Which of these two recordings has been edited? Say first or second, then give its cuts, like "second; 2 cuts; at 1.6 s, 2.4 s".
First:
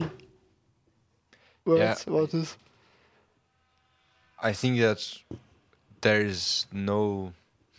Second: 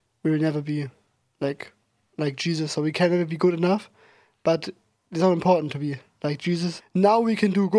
second; 1 cut; at 6.8 s